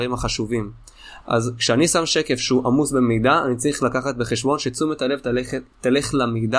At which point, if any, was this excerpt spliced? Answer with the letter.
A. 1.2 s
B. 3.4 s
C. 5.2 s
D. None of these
A